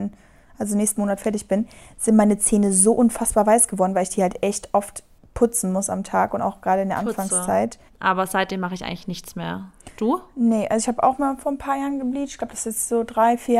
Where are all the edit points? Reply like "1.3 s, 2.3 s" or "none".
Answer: 7.9 s